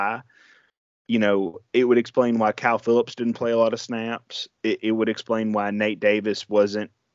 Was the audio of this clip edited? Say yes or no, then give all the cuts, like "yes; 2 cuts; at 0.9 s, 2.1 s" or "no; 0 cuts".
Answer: no; 0 cuts